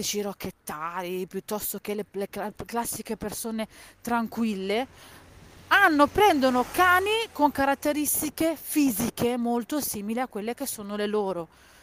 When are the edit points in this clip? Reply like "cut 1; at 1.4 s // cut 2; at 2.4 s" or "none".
none